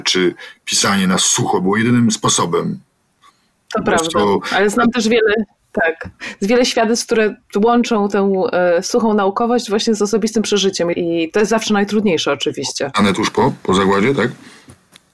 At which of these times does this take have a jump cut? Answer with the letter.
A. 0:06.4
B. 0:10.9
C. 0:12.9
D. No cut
B